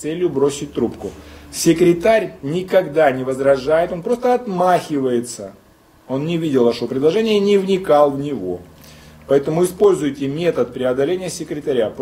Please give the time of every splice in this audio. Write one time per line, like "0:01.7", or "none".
none